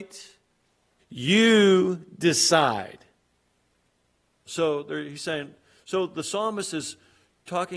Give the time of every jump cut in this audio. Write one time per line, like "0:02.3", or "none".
0:01.0
0:04.5